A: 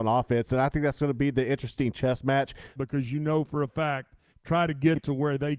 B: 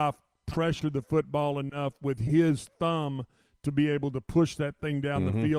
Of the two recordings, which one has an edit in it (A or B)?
A